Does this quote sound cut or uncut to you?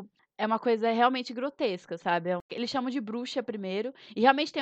uncut